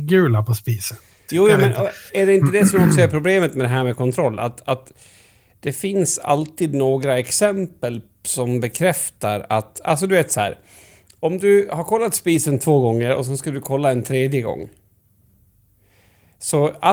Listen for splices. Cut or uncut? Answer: cut